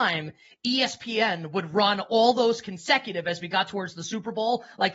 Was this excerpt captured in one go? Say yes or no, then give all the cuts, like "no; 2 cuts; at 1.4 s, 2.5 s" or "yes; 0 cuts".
yes; 0 cuts